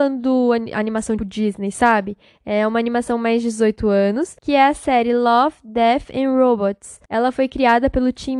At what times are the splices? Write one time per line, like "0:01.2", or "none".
0:01.2